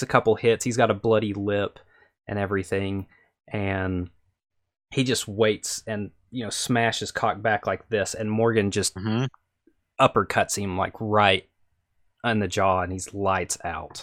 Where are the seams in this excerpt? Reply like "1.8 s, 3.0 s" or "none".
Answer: none

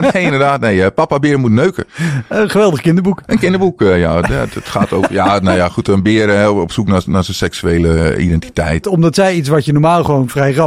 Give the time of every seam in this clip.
8.8 s

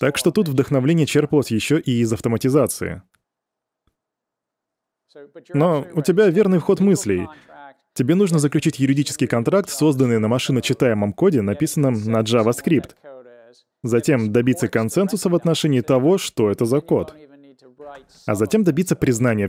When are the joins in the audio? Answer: none

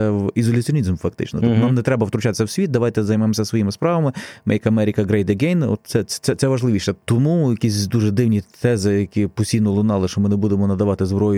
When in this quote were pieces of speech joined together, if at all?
7.0 s

